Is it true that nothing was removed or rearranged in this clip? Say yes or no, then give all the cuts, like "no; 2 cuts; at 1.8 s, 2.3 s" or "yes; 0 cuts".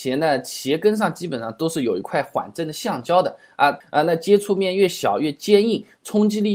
no; 1 cut; at 3.8 s